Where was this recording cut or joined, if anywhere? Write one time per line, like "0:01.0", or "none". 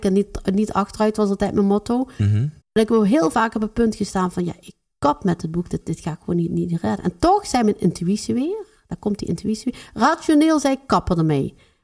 0:02.6